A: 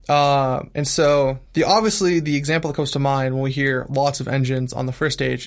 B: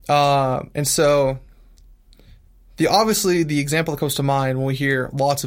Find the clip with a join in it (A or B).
A